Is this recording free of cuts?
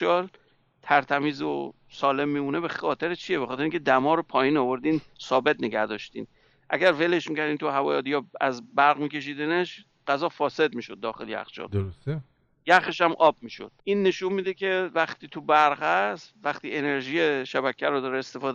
no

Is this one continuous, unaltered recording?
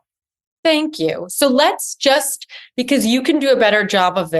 yes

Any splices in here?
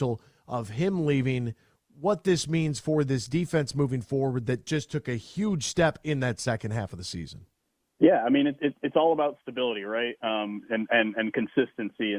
no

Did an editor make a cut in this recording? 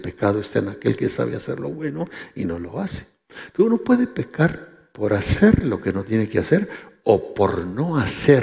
no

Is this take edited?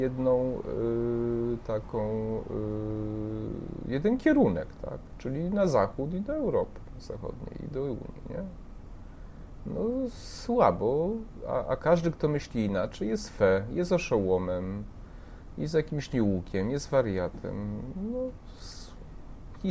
no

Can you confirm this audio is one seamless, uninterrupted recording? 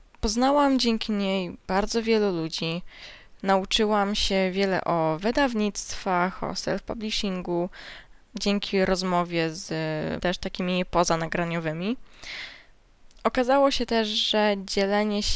no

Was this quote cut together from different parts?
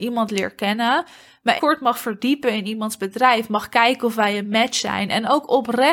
yes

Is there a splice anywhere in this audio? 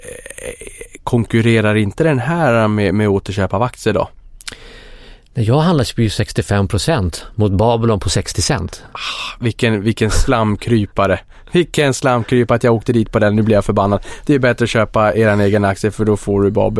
no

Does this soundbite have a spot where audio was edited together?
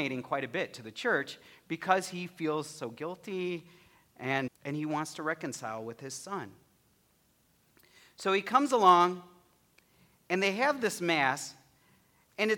yes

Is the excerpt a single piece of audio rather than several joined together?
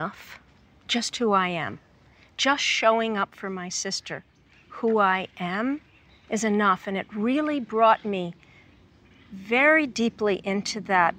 yes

